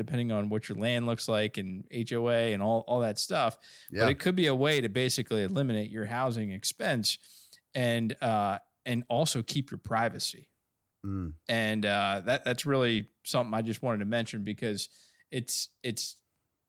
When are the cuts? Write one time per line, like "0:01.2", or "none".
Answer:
none

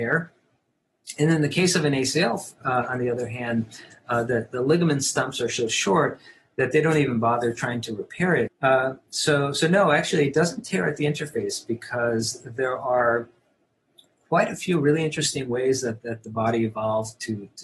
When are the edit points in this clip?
0:08.5

